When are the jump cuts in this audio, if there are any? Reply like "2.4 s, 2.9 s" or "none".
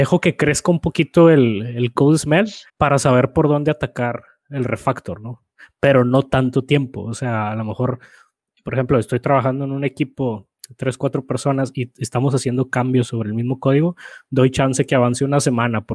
2.7 s